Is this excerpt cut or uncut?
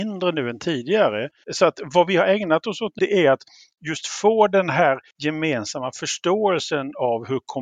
cut